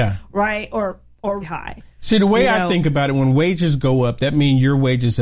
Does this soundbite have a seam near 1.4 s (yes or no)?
yes